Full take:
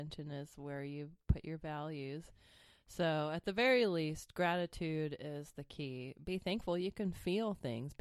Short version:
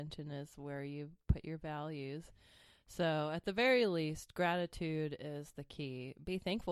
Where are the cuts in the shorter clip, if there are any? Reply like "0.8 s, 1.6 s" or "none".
none